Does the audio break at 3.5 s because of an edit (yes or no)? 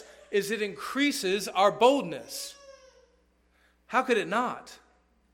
no